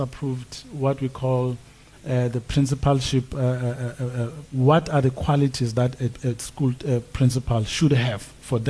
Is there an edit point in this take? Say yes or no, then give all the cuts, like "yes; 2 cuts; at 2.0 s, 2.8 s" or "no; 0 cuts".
yes; 1 cut; at 4.5 s